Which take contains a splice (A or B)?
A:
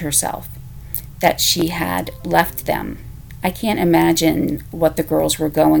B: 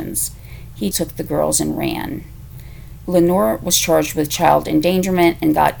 B